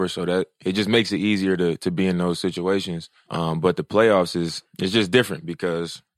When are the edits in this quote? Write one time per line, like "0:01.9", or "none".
none